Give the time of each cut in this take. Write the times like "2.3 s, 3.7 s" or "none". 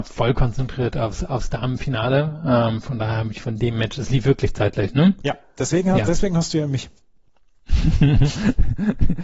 none